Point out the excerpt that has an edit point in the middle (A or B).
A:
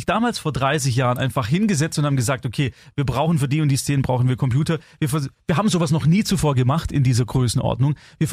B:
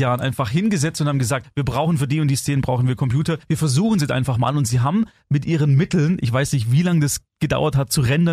B